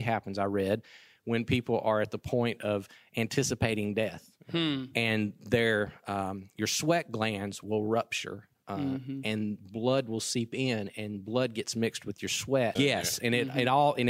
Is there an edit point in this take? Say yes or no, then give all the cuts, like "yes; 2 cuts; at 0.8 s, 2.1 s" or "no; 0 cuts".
yes; 1 cut; at 12.8 s